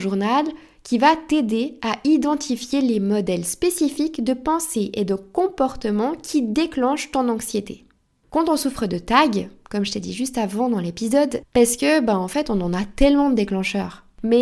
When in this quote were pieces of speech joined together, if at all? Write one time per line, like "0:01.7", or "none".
0:08.2
0:11.4